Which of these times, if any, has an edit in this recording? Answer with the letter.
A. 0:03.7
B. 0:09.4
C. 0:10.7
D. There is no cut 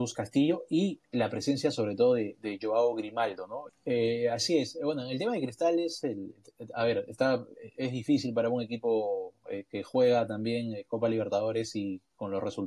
A